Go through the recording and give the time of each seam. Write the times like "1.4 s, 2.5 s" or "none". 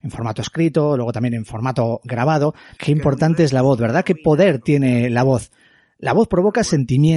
2.8 s

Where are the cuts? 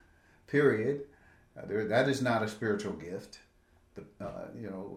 none

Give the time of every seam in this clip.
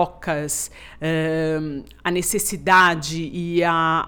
none

